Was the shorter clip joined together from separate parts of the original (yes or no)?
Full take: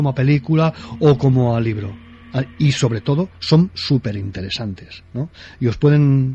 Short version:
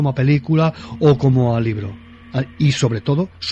no